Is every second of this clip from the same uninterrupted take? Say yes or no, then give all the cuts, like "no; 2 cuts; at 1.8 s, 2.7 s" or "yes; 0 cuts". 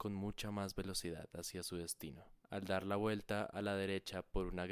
no; 1 cut; at 2.4 s